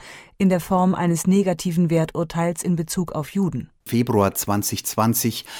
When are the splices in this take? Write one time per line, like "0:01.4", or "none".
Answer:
0:03.9